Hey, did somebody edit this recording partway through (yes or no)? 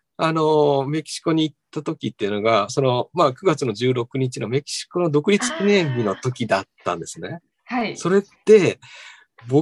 no